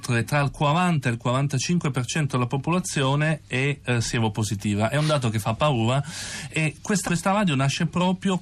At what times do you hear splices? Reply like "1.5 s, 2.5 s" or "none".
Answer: 7.1 s